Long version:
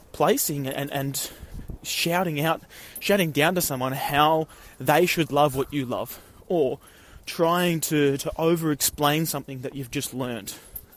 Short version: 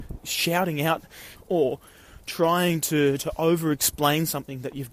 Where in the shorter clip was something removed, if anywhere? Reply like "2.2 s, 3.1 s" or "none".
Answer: 1.3 s